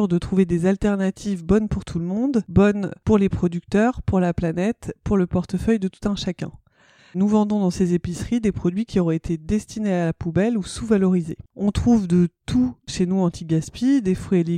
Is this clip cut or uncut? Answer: cut